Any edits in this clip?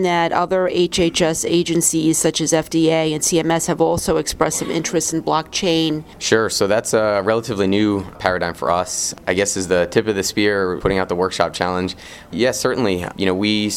yes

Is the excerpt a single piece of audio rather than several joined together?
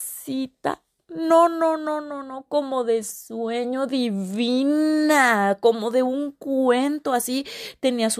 yes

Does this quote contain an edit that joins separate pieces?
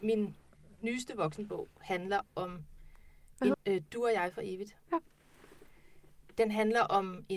yes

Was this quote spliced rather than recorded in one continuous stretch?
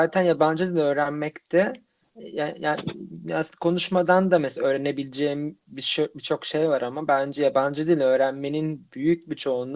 no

